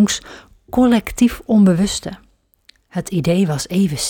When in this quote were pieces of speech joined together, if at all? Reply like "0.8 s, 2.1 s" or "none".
none